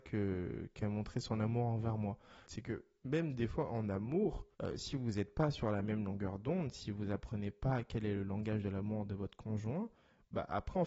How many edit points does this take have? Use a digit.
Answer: 2